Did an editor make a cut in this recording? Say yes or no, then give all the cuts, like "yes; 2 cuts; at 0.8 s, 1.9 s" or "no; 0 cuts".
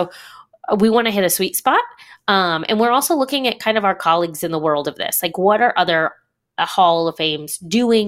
no; 0 cuts